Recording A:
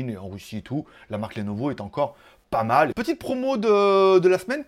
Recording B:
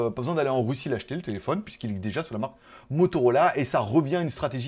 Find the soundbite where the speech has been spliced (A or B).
A